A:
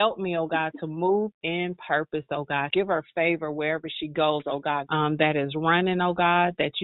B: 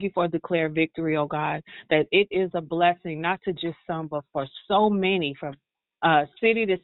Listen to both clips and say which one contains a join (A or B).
A